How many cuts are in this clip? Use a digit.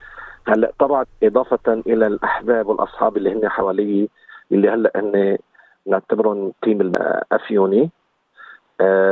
1